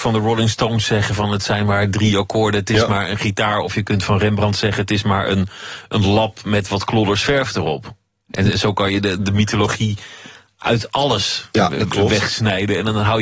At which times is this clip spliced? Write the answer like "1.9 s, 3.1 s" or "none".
none